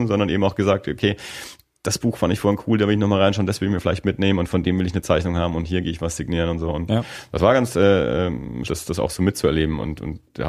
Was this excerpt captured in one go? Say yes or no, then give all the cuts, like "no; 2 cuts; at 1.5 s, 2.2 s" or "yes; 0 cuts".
no; 1 cut; at 8.6 s